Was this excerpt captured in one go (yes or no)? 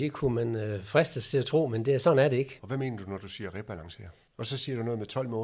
no